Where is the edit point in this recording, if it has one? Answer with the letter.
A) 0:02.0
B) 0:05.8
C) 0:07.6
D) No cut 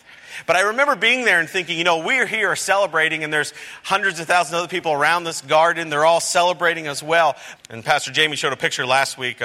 C